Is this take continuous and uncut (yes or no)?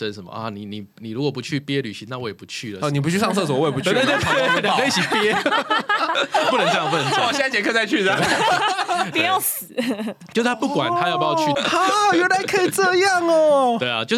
no